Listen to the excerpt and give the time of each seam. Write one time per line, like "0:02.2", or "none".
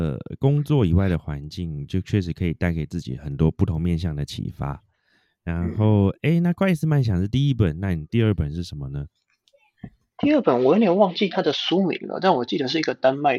none